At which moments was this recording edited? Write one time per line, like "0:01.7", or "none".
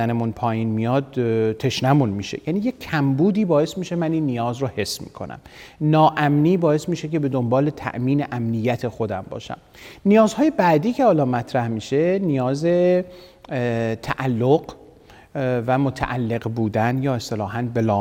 none